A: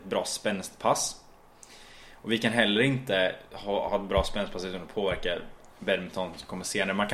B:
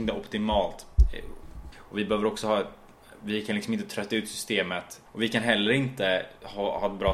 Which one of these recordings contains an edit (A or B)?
B